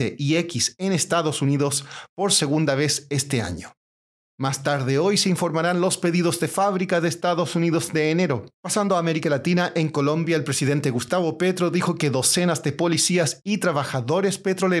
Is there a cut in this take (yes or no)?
yes